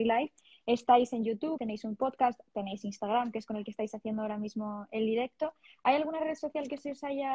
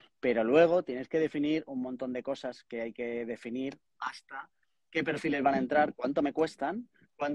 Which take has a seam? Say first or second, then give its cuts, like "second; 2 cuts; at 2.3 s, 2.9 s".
first; 1 cut; at 1.6 s